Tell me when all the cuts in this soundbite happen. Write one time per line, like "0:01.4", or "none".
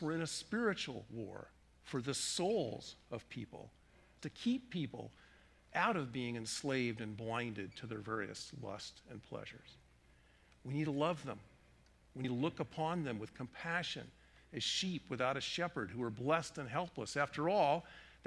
0:04.2